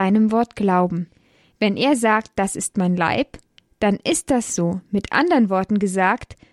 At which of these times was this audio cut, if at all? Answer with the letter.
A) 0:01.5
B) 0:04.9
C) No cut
C